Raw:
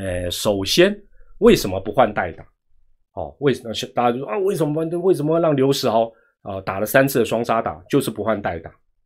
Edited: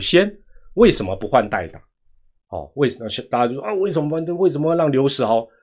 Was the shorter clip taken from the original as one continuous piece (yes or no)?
yes